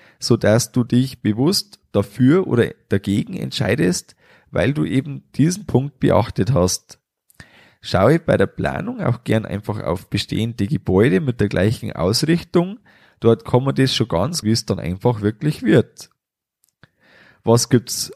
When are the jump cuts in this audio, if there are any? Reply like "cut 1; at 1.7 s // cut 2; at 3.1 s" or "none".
cut 1; at 14.4 s